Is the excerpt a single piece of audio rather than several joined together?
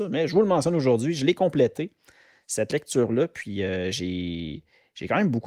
yes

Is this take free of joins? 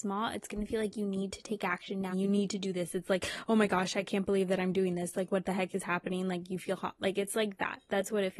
no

